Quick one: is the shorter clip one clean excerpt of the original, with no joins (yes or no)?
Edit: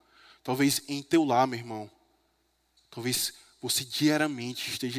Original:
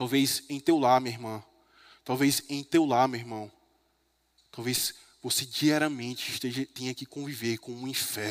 yes